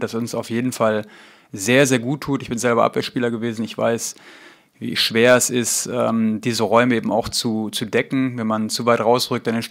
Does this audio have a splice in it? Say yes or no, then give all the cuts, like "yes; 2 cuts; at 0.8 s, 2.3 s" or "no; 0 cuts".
no; 0 cuts